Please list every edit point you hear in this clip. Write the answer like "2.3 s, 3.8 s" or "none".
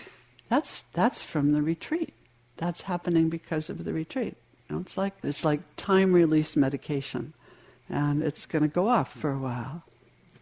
5.2 s